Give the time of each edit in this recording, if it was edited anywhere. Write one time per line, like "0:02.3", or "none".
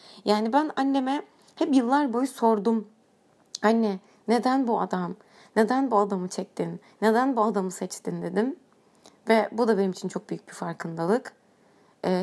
none